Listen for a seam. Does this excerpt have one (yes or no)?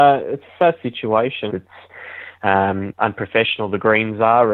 yes